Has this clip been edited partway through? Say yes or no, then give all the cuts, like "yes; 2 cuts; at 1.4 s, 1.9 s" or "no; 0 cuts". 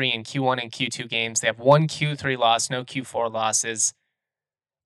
no; 0 cuts